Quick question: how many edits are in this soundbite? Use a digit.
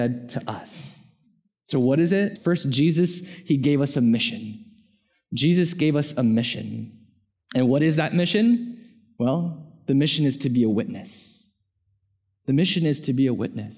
1